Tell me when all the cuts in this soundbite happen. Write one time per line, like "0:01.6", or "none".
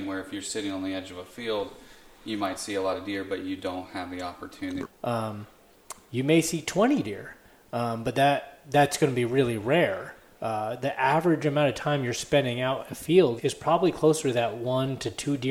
0:04.8
0:13.4